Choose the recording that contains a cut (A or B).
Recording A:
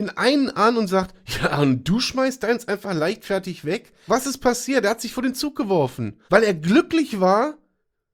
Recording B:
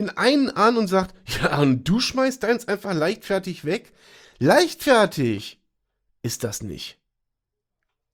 A